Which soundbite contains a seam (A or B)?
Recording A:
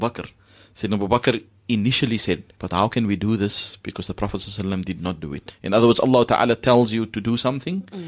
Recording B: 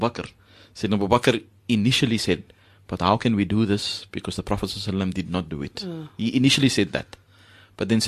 A